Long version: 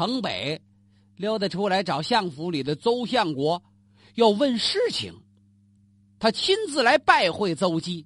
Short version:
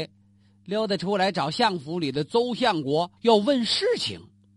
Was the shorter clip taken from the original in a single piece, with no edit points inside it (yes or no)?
no